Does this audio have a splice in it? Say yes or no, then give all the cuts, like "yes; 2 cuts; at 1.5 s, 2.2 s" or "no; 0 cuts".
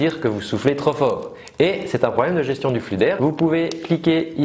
yes; 1 cut; at 3.2 s